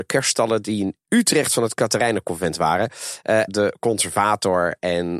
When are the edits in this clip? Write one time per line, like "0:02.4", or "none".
0:03.5